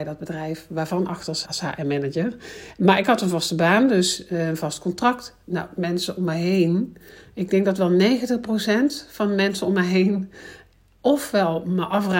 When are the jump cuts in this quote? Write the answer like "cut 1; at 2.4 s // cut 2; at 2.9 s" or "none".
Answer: cut 1; at 1.4 s